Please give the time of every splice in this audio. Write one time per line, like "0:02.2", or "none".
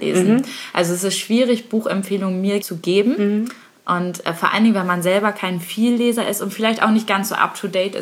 0:02.6